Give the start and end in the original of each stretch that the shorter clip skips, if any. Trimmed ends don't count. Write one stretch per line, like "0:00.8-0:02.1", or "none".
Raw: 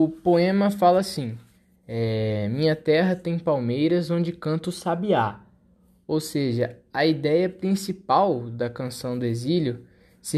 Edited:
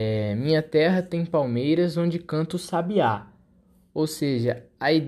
none